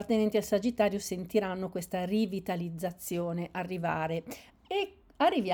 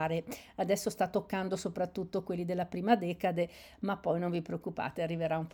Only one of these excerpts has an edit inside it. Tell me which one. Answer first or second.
first